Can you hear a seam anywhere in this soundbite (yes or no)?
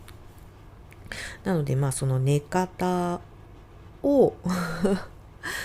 no